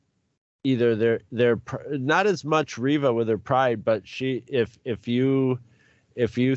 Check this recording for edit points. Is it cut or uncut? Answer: uncut